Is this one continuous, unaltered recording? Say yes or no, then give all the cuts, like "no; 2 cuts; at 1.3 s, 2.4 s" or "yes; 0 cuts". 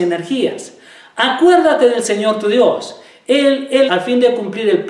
no; 1 cut; at 3.9 s